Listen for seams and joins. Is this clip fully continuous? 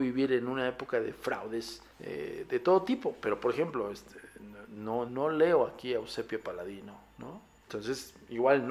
no; 3 cuts; at 1.9 s, 5.1 s, 7.6 s

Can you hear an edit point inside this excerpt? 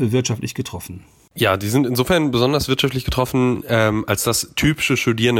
no; 0 cuts

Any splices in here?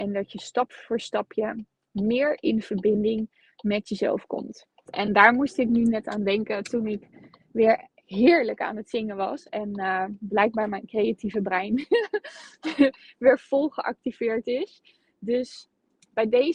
yes; 1 cut; at 4.9 s

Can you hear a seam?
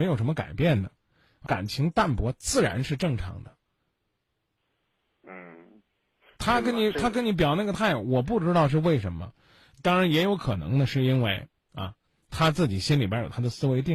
yes; 1 cut; at 1.5 s

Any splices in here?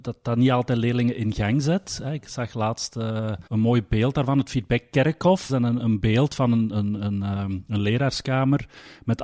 yes; 2 cuts; at 3.5 s, 5.5 s

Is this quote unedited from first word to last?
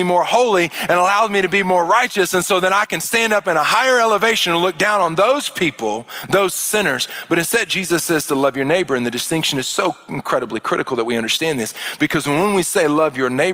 yes; 0 cuts

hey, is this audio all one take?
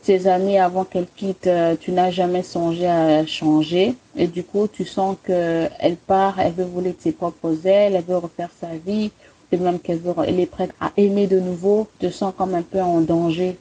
yes; 0 cuts

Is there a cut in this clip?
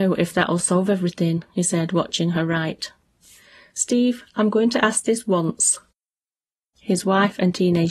yes; 1 cut; at 6.6 s

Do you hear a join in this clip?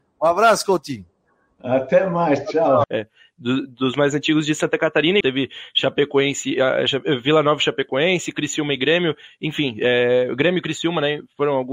yes; 2 cuts; at 2.8 s, 5.2 s

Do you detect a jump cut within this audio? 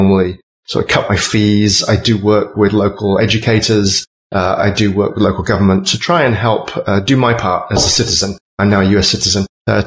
no; 0 cuts

